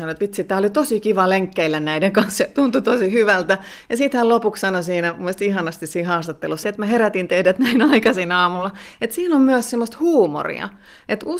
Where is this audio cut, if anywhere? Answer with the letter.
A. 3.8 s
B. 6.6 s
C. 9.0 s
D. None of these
B